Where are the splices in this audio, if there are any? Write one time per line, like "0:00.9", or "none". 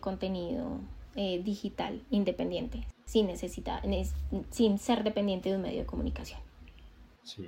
none